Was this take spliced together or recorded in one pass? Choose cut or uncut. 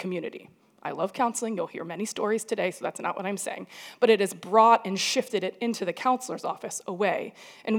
uncut